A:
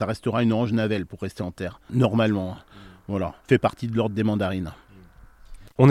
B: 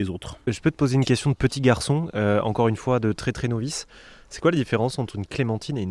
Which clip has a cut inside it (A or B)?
A